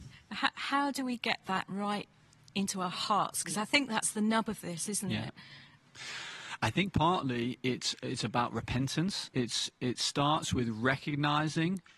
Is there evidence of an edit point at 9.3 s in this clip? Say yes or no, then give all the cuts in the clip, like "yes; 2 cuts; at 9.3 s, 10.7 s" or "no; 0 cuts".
yes; 1 cut; at 9.3 s